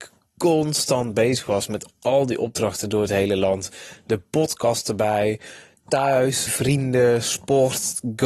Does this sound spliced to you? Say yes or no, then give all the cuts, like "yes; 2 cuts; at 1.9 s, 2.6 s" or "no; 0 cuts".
yes; 1 cut; at 6.5 s